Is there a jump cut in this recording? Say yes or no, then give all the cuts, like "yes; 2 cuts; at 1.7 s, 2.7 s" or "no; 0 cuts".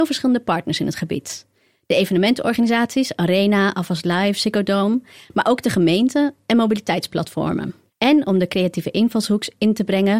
no; 0 cuts